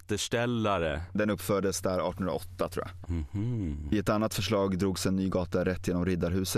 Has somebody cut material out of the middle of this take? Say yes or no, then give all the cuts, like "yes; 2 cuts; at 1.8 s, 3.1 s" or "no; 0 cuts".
yes; 1 cut; at 3.0 s